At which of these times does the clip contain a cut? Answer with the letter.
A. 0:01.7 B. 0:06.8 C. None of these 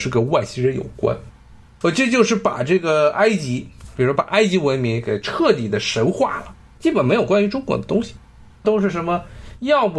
B